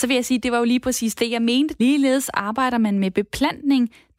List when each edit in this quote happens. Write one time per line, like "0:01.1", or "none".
0:01.8